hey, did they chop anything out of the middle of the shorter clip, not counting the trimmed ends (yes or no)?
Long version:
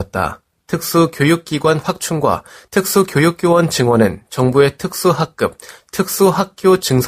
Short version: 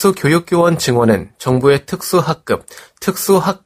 no